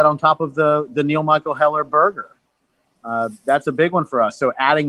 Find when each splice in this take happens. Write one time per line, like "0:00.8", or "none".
none